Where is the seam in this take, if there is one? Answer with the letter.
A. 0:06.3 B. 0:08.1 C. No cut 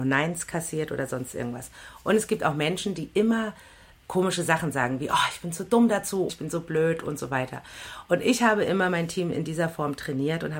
A